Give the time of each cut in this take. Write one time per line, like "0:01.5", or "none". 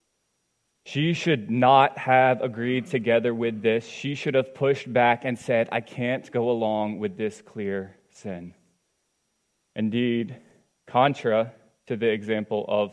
none